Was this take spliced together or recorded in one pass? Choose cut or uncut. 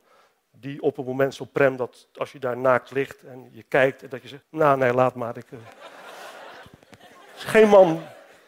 cut